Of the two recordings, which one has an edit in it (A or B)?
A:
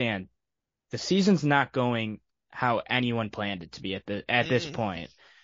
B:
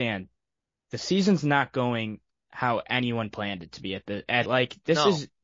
B